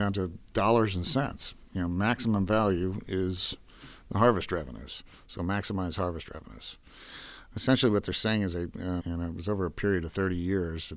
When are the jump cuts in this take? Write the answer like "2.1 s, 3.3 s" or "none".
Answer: 7.5 s, 9.0 s